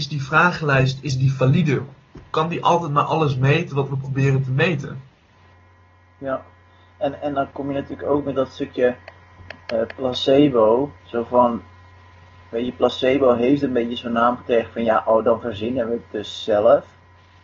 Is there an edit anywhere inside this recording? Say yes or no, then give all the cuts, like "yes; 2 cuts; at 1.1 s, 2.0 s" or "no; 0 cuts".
yes; 1 cut; at 11.0 s